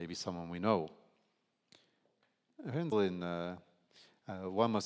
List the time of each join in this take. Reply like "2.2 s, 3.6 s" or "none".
2.9 s